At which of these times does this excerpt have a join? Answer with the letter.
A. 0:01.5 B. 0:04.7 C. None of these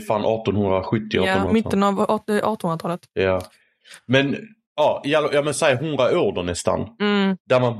A